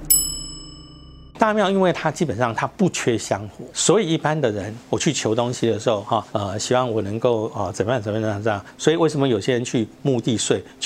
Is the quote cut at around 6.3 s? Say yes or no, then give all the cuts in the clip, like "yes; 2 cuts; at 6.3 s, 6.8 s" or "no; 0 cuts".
yes; 3 cuts; at 1.3 s, 6.3 s, 8.7 s